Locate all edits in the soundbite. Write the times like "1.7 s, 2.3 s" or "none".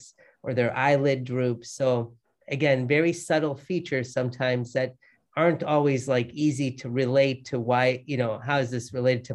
none